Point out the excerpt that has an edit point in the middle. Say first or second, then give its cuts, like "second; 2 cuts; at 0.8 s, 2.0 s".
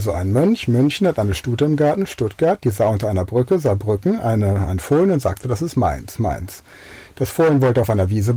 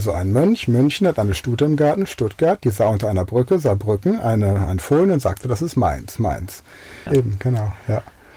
second; 1 cut; at 7.1 s